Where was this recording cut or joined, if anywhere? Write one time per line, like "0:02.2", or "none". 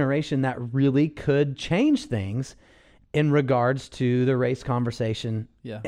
none